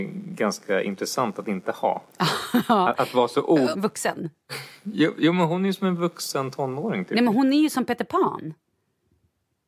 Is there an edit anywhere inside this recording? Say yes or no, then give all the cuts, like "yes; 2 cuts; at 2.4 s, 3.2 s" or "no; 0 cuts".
yes; 1 cut; at 3.7 s